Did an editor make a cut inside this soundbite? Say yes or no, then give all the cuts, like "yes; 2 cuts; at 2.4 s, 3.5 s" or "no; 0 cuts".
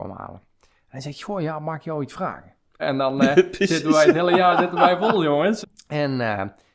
yes; 2 cuts; at 2.8 s, 5.6 s